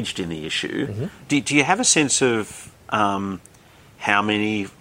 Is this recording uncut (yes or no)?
yes